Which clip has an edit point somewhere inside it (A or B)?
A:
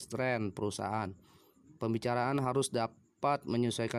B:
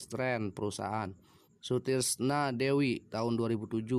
B